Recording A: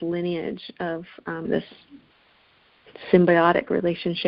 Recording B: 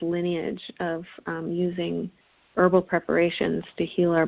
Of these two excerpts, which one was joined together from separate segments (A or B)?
A